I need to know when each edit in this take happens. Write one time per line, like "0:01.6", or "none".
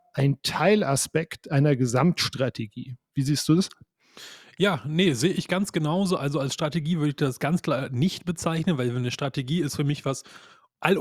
none